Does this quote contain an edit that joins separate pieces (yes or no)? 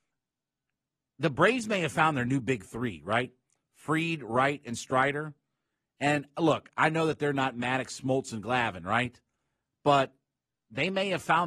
no